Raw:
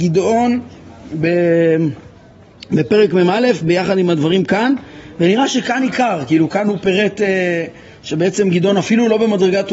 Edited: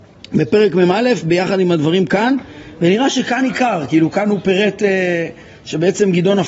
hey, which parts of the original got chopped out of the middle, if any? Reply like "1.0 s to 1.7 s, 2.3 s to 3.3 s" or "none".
none